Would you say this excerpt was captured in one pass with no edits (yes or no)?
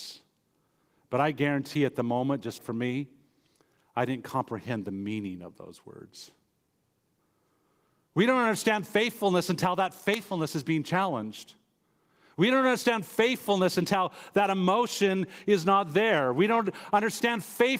no